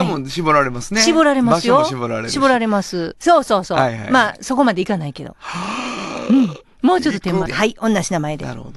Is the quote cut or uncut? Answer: cut